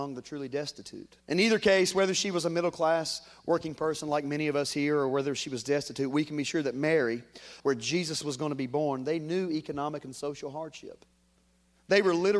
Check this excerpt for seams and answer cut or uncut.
cut